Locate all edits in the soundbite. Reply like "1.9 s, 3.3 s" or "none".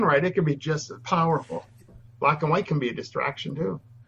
2.1 s